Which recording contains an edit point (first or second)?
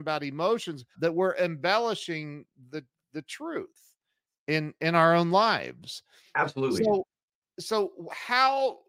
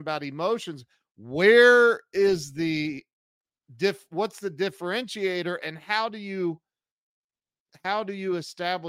first